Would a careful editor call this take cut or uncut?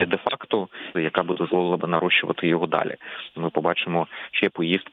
cut